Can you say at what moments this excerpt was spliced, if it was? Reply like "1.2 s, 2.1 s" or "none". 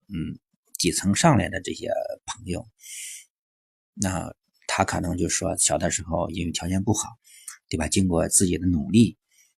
none